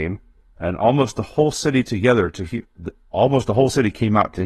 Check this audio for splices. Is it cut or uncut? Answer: cut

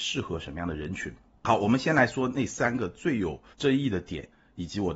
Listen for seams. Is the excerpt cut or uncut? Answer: cut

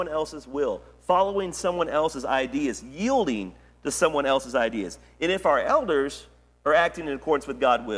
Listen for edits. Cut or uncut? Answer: uncut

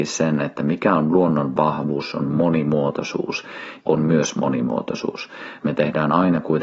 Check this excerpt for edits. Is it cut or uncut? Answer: cut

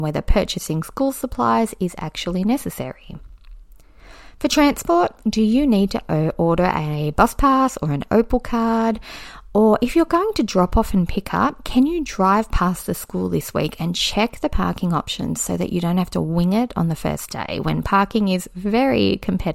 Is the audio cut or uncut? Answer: uncut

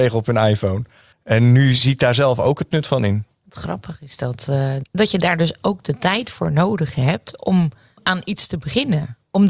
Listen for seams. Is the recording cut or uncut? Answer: uncut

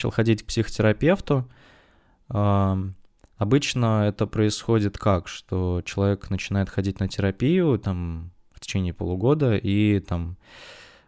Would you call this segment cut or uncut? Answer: uncut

